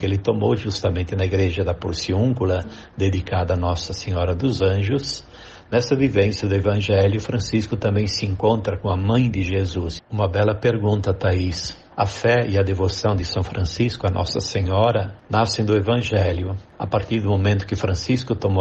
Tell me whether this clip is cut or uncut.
cut